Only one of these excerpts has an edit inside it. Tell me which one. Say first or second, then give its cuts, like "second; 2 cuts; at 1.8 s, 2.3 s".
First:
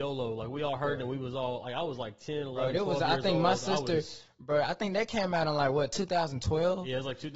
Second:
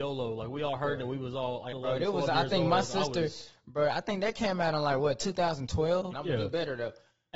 second; 2 cuts; at 1.7 s, 6.1 s